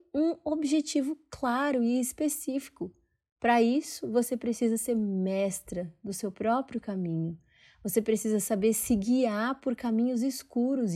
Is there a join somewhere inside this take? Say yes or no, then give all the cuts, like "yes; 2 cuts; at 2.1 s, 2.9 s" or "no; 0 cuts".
no; 0 cuts